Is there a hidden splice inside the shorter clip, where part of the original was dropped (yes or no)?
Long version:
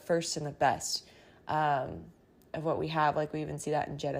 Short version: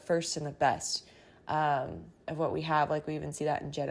yes